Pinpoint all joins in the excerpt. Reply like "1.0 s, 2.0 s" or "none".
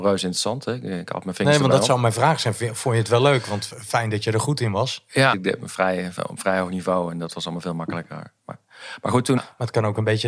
5.3 s, 9.4 s